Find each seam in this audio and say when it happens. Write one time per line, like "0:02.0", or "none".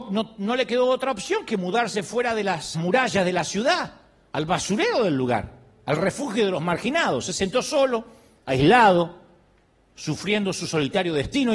0:02.7